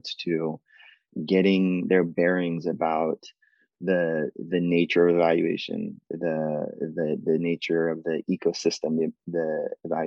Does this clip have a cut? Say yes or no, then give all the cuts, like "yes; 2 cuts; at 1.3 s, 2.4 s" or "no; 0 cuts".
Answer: no; 0 cuts